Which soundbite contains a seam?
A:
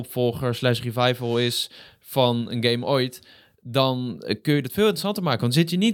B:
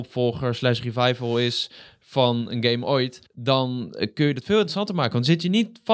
B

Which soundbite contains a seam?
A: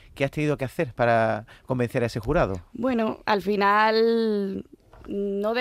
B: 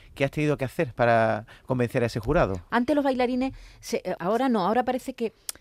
B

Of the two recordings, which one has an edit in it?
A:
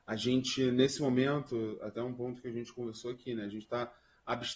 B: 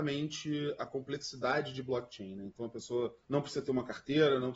B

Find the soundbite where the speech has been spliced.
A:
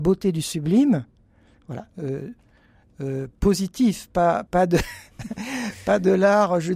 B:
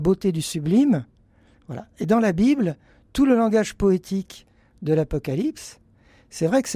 A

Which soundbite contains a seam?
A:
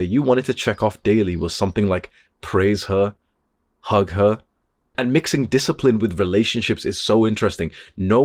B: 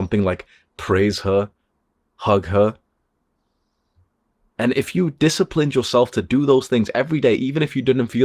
A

